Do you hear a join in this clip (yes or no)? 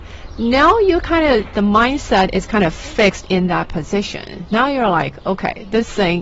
no